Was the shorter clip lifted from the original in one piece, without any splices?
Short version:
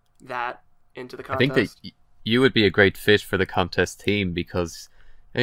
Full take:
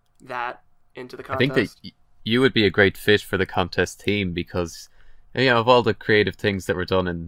yes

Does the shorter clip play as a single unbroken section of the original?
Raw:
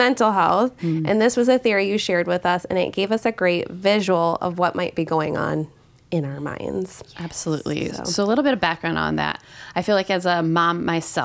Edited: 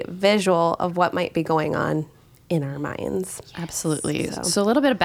yes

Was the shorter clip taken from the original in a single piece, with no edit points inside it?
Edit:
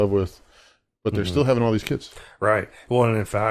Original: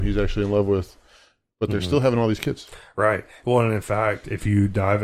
yes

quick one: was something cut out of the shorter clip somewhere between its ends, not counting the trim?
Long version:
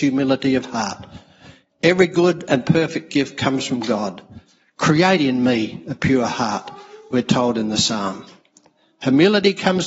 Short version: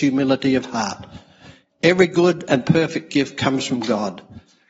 no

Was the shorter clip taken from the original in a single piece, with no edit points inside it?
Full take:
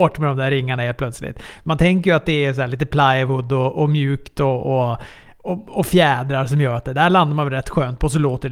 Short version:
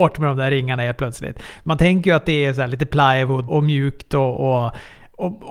no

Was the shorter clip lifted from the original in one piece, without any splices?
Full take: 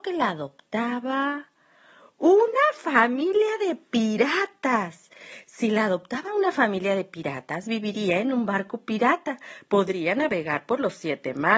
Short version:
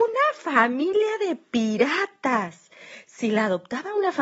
yes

